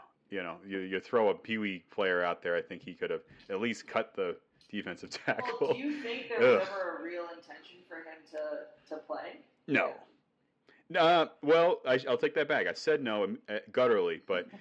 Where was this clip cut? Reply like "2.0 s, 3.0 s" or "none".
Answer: none